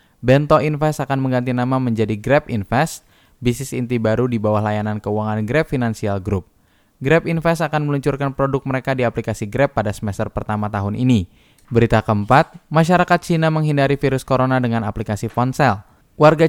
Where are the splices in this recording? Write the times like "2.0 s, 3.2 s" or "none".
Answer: 11.6 s